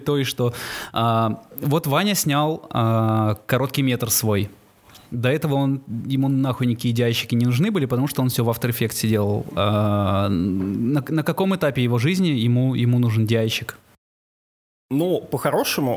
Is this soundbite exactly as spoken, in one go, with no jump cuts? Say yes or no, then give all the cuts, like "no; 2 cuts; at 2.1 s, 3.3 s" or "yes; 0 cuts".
yes; 0 cuts